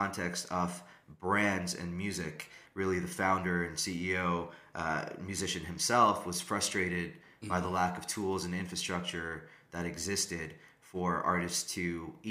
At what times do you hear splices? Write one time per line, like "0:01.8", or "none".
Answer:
0:02.7